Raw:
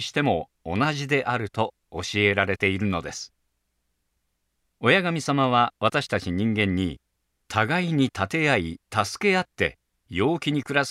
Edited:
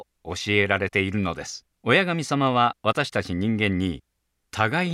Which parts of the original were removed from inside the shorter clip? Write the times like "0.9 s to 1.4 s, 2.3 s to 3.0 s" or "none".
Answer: 3.4 s to 4.7 s